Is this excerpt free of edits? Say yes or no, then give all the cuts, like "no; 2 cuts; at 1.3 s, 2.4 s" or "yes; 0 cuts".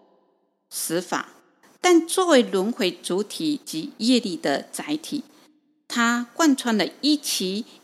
yes; 0 cuts